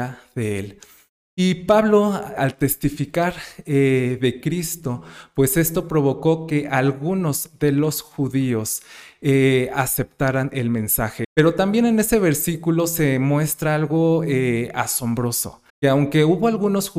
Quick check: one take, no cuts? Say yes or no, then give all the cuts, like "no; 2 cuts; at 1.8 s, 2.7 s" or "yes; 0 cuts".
no; 3 cuts; at 2.4 s, 11.2 s, 15.7 s